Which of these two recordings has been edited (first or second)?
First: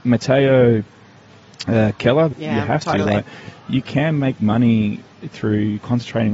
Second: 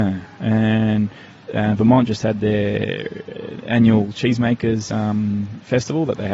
first